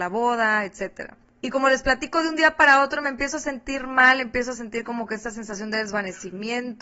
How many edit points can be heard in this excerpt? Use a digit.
0